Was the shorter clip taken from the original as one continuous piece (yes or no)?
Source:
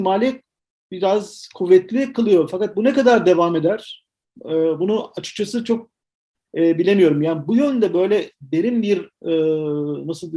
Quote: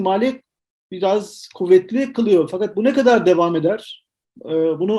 yes